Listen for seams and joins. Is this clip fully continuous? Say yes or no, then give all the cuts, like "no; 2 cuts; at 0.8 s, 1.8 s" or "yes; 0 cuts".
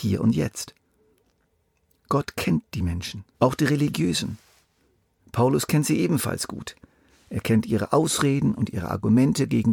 no; 1 cut; at 3.3 s